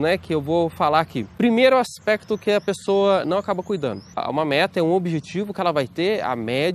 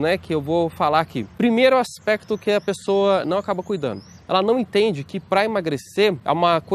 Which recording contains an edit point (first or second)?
first